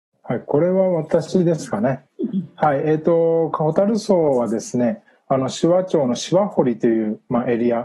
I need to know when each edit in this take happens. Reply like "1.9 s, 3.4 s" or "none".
none